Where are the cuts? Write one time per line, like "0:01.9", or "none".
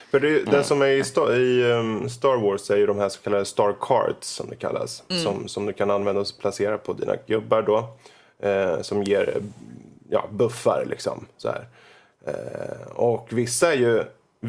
none